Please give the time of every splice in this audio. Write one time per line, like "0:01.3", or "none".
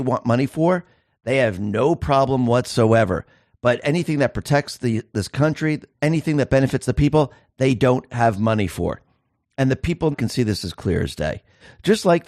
0:05.9
0:10.1